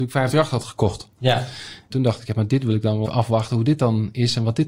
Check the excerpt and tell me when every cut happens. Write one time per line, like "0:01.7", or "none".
0:01.9
0:03.1